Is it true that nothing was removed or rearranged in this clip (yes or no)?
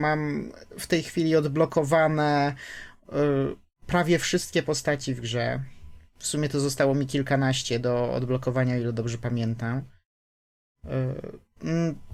yes